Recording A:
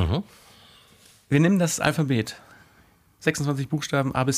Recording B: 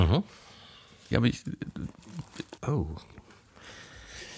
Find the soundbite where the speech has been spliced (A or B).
B